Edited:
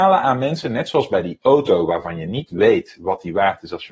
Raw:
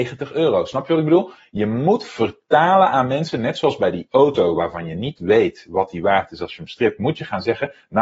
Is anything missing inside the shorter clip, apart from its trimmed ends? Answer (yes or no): no